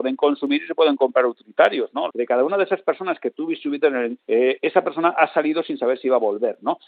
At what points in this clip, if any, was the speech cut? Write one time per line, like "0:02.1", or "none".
0:02.1
0:04.2